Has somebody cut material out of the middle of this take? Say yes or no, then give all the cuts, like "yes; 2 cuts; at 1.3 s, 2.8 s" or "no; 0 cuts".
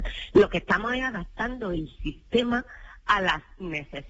no; 0 cuts